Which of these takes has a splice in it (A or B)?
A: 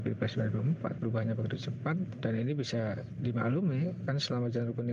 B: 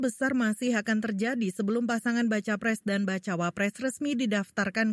A